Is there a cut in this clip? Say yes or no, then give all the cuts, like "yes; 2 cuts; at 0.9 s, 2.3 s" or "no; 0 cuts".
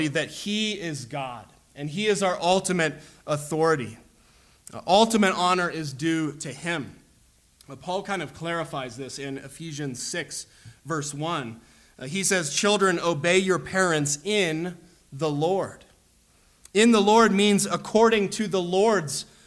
no; 0 cuts